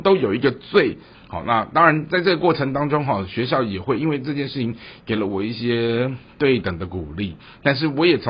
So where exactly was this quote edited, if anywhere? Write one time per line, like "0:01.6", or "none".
0:01.1